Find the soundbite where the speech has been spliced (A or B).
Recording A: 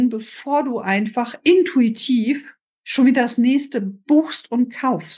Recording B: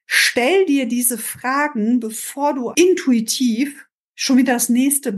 B